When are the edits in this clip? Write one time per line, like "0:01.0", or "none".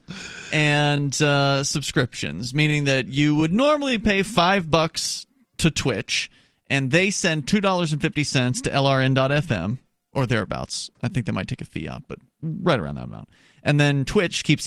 none